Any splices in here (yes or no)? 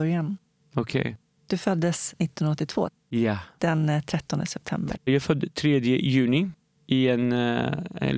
yes